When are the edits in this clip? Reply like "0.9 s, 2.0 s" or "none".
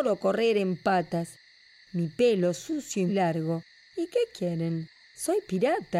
3.1 s

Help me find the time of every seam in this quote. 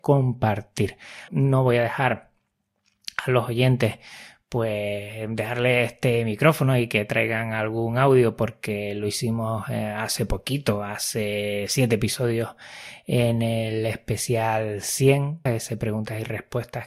1.3 s, 15.5 s

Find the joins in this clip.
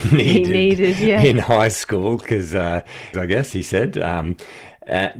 3.1 s

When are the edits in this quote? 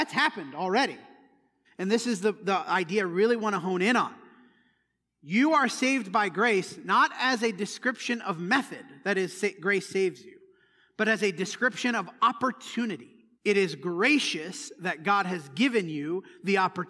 1.6 s, 13.3 s

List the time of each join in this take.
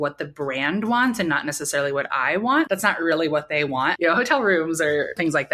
2.7 s, 4.0 s

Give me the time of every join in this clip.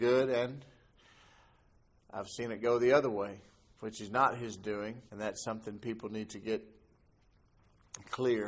5.1 s

